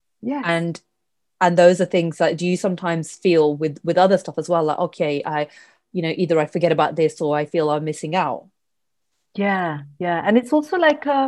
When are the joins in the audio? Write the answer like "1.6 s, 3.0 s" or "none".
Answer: none